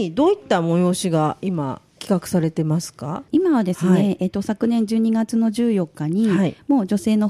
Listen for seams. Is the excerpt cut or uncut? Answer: cut